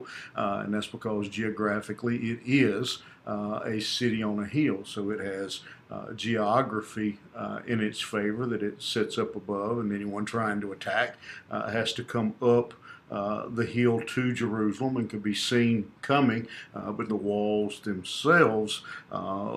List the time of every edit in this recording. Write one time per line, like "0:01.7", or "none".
0:16.0
0:17.1